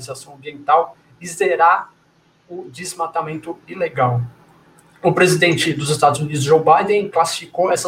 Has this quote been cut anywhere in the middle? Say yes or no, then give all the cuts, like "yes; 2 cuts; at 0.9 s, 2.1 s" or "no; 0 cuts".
no; 0 cuts